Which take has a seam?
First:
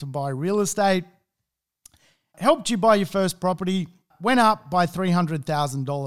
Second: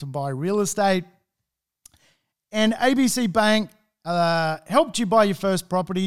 first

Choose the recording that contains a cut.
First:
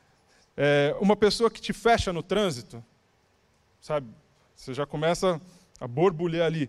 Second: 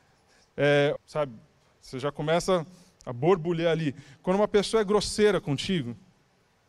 second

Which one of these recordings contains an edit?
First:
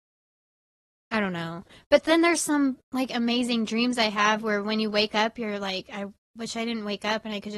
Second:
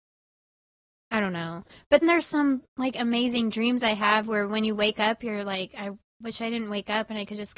second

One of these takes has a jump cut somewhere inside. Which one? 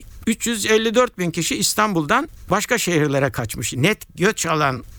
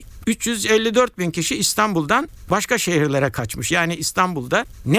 first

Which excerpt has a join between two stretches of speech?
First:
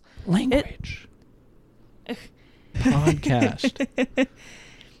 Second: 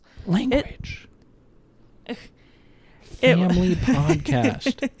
first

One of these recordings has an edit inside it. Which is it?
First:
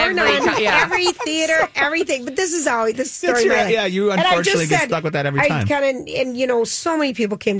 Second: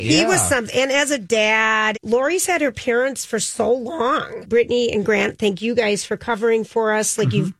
second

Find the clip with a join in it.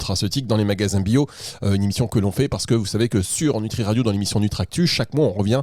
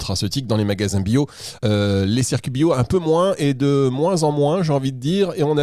second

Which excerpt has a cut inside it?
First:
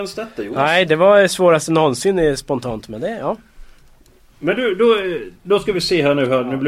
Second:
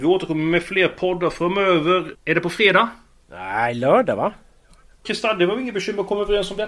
second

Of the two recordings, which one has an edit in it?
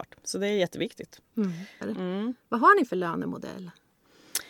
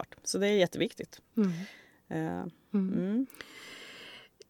first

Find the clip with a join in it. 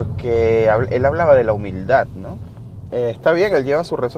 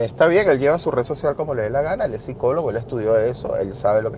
first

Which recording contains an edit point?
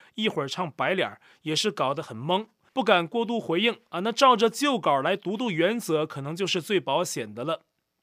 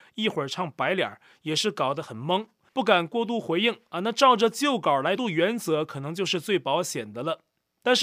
second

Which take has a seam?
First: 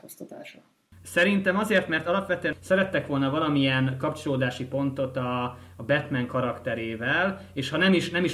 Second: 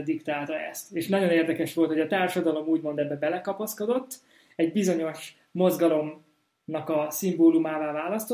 first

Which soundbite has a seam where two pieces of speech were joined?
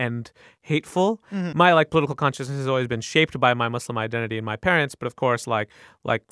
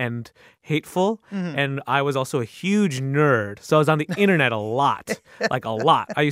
first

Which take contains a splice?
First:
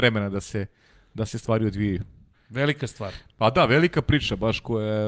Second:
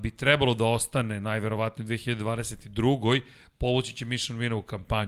first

